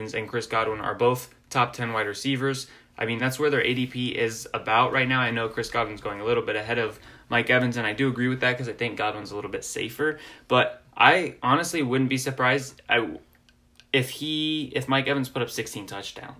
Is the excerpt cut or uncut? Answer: uncut